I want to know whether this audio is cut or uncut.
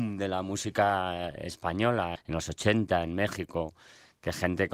cut